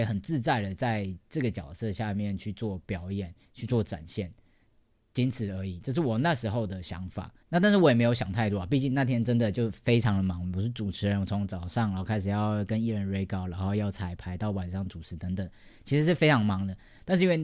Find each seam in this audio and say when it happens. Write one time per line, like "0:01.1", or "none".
0:07.4